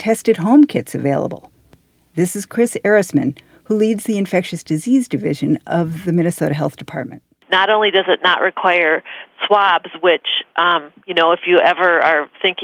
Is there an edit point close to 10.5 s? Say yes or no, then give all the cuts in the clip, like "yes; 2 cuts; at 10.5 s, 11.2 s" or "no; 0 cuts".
no; 0 cuts